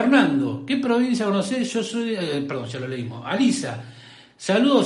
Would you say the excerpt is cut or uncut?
uncut